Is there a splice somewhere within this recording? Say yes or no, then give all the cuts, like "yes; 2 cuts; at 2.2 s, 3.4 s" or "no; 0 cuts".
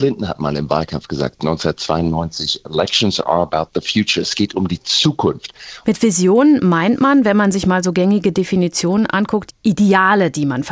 yes; 2 cuts; at 5.8 s, 9.5 s